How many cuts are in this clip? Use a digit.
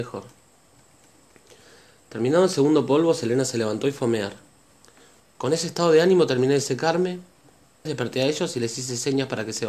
2